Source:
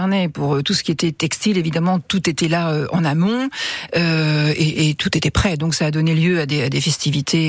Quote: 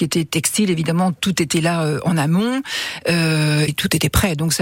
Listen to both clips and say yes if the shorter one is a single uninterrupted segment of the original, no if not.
no